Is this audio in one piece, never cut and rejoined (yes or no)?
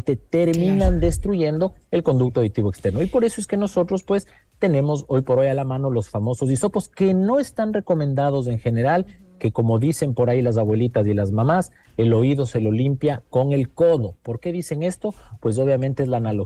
yes